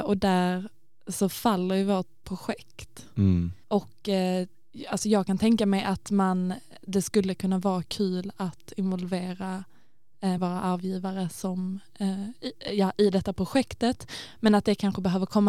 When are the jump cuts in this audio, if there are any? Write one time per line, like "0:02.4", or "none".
0:10.4